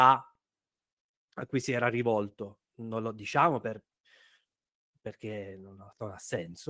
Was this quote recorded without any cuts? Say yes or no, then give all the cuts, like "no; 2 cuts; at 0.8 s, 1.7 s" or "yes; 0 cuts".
no; 1 cut; at 2.7 s